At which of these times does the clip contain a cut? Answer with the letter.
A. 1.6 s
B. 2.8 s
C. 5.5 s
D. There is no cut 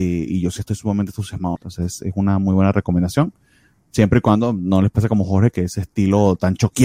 A